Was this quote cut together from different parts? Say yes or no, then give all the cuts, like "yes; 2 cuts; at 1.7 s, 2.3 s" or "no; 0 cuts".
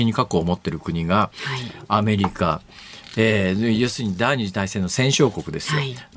no; 0 cuts